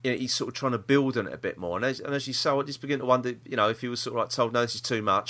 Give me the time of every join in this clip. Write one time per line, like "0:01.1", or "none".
none